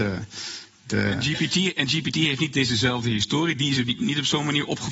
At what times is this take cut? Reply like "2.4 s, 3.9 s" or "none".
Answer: none